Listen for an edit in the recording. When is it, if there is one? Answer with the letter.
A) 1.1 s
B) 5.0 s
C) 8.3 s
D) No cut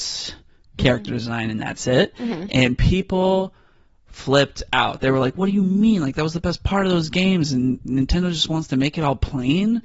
D